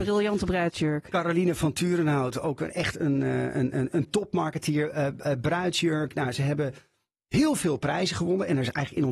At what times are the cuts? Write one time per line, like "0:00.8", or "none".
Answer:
none